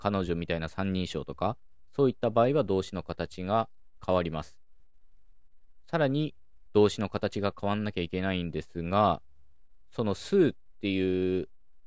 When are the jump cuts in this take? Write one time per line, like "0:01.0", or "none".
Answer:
0:06.6
0:09.9